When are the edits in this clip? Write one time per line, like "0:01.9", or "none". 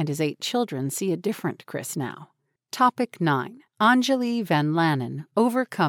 0:02.6
0:03.7